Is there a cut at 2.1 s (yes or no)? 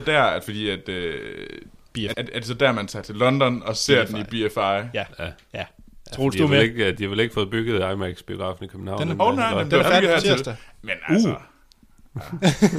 yes